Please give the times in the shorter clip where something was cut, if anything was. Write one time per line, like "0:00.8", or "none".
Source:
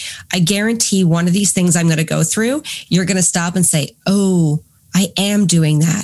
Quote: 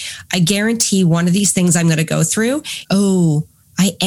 0:02.8